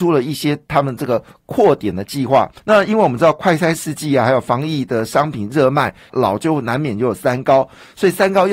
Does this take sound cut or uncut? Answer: cut